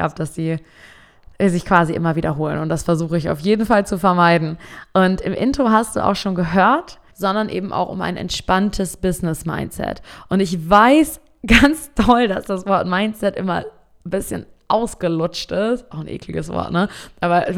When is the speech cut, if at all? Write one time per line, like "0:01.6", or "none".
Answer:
0:07.1